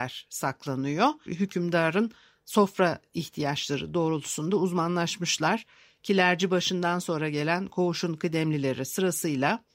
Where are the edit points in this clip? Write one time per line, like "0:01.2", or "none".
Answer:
0:01.3